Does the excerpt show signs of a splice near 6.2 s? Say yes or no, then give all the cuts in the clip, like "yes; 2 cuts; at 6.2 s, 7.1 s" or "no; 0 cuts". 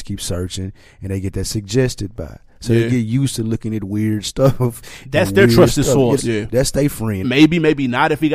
yes; 2 cuts; at 6.2 s, 7.2 s